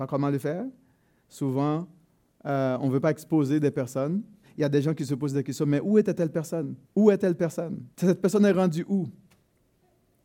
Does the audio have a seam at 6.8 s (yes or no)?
yes